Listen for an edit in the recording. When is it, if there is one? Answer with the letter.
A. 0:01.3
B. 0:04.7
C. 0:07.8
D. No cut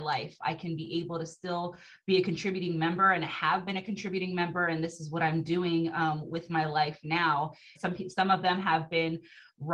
C